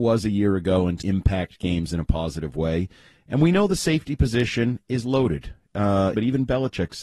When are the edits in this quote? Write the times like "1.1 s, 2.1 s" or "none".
1.0 s, 6.1 s